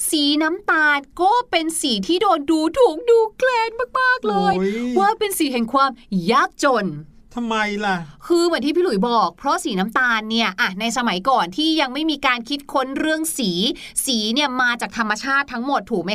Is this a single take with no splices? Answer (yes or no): yes